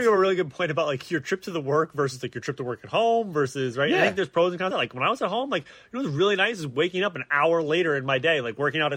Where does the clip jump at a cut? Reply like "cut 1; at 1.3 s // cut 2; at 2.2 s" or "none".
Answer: none